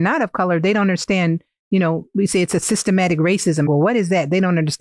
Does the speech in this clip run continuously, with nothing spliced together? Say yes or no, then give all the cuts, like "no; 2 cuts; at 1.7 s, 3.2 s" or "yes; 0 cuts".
no; 1 cut; at 3.7 s